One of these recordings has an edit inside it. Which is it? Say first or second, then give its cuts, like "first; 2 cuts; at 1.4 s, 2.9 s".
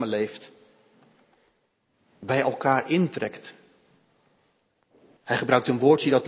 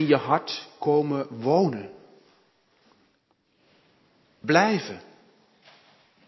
first; 1 cut; at 5.2 s